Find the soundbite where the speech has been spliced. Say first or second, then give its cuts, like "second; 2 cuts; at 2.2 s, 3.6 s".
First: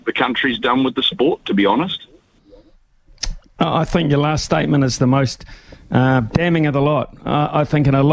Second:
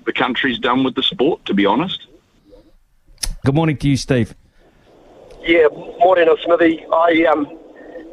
second; 1 cut; at 3.4 s